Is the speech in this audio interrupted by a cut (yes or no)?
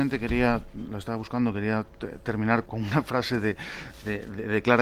yes